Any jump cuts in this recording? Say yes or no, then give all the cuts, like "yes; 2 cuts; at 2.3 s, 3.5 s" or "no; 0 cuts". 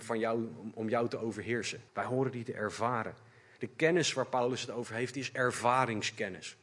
yes; 1 cut; at 1.9 s